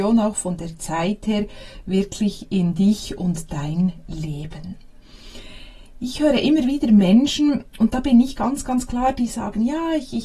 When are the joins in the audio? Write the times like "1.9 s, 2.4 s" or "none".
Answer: none